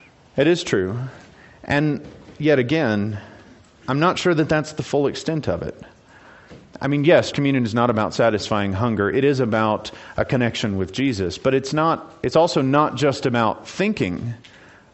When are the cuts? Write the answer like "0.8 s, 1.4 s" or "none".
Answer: 7.3 s